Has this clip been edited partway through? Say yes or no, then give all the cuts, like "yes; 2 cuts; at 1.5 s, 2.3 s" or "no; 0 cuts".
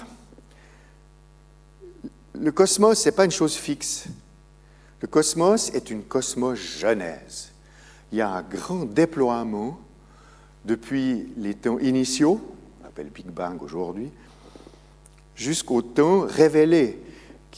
no; 0 cuts